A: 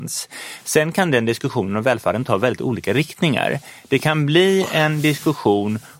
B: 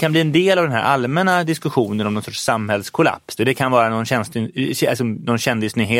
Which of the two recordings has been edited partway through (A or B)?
B